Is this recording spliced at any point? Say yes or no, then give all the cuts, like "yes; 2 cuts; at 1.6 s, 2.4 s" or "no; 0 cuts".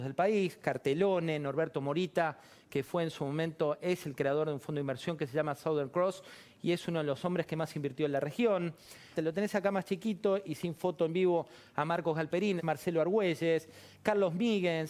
yes; 2 cuts; at 9.1 s, 12.6 s